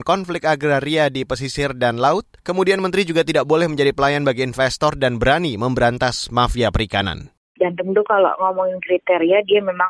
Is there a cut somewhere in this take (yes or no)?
yes